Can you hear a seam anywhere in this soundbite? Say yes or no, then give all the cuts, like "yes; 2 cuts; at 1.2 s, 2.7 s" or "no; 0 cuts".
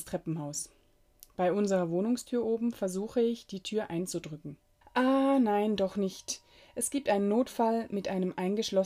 yes; 1 cut; at 4.8 s